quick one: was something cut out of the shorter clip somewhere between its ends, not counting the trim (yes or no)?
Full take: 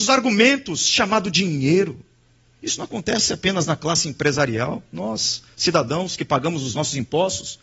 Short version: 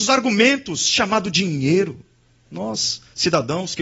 yes